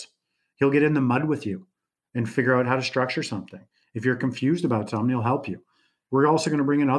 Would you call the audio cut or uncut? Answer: uncut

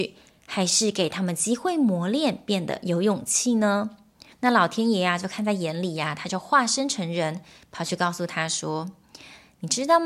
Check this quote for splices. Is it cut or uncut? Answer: cut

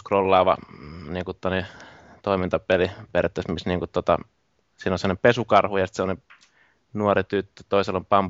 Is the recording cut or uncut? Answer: uncut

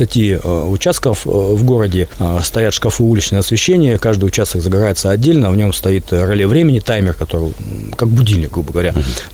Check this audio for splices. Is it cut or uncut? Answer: uncut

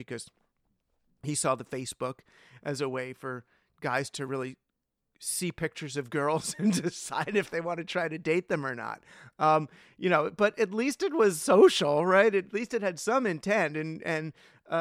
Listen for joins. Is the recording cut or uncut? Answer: uncut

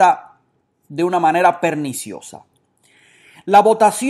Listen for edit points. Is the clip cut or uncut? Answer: uncut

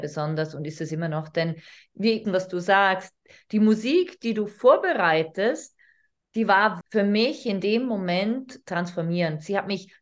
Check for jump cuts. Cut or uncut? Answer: cut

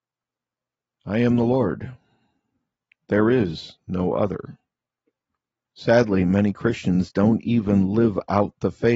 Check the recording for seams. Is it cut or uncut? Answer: cut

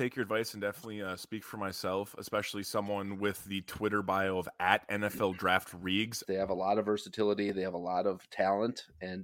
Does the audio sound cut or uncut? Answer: cut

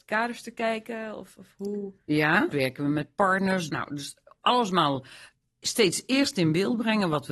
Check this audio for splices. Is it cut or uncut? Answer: cut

